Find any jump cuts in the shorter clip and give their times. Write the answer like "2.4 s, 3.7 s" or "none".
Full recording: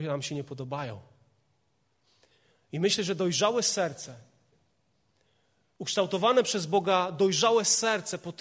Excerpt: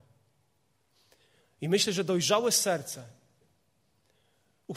none